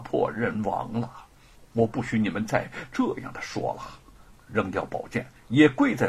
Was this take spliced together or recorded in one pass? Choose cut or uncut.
cut